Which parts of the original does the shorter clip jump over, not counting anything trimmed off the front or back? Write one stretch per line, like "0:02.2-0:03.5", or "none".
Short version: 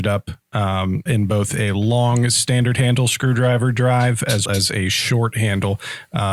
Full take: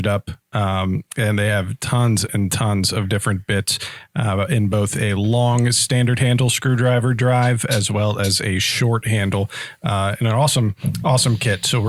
0:01.1-0:04.5
0:07.9-0:08.2